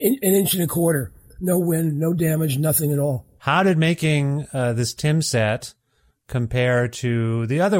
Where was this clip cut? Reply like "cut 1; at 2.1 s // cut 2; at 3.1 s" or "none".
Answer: cut 1; at 3.4 s